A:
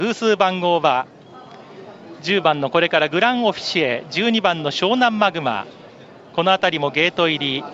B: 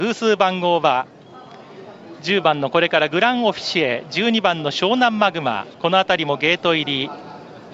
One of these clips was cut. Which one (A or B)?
B